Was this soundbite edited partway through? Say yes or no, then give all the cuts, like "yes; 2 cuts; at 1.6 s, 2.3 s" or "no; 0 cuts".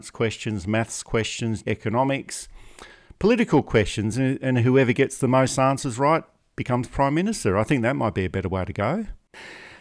yes; 2 cuts; at 1.6 s, 4.1 s